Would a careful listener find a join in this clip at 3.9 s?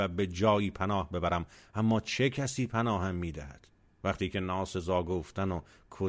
yes; 1 cut; at 3.9 s

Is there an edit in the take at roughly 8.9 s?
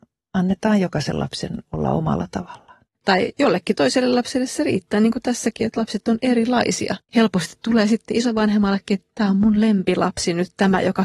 no; 2 cuts; at 2.9 s, 7.1 s

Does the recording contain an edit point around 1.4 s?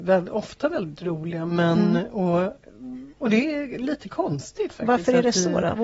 no; 1 cut; at 3.1 s

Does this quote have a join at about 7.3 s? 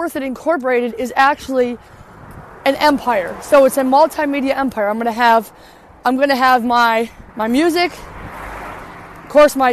yes; 1 cut; at 7.3 s

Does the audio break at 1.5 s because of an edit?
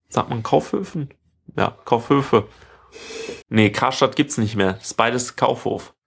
no; 1 cut; at 3.4 s

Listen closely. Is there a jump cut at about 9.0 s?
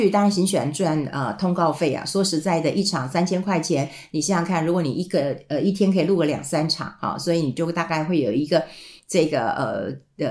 no; 0 cuts

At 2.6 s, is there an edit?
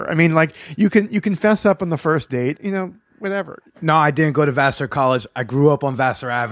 yes; 1 cut; at 2.6 s

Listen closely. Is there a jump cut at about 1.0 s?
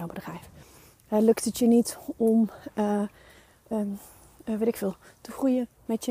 no; 0 cuts

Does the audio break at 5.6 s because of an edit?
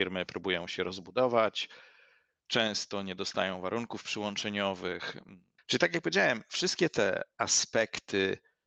yes; 1 cut; at 5.6 s

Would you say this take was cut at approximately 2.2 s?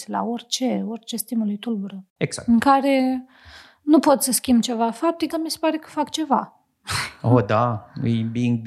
yes; 2 cuts; at 2.2 s, 5.3 s

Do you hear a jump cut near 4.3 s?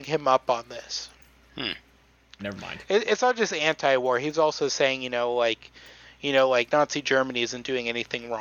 no; 1 cut; at 2.4 s

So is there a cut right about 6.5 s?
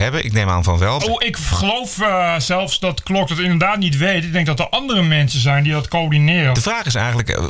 yes; 2 cuts; at 1.0 s, 6.5 s

